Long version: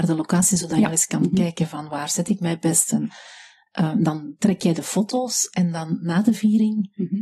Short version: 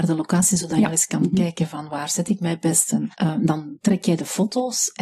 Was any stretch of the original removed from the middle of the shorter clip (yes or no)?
yes